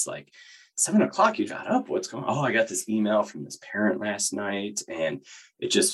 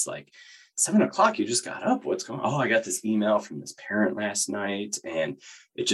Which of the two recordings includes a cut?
first; 1 cut; at 1.5 s

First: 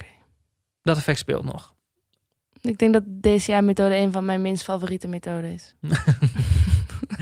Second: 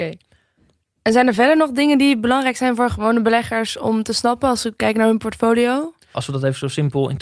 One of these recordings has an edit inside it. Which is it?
second; 1 cut; at 6.1 s

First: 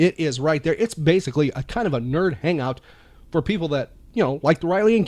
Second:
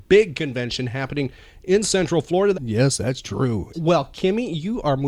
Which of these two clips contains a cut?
second; 2 cuts; at 2.5 s, 3.7 s

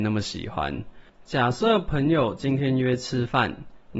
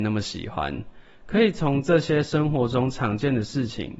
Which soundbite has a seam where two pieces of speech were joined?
first; 1 cut; at 1.1 s

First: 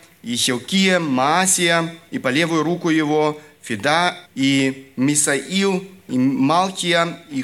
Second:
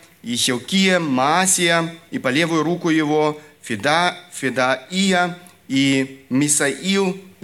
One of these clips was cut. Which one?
first; 1 cut; at 4.3 s

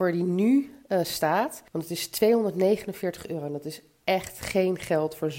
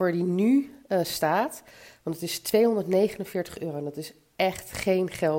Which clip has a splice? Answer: first; 1 cut; at 1.7 s

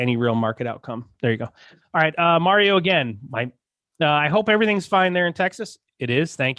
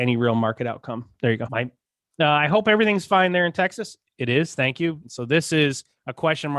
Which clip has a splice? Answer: second; 2 cuts; at 1.5 s, 5.0 s

